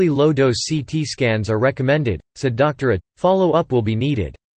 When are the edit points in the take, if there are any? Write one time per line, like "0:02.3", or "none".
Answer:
0:03.0